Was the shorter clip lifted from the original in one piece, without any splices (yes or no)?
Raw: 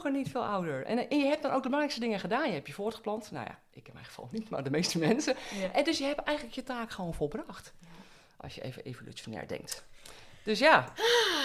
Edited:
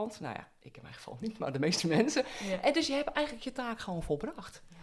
yes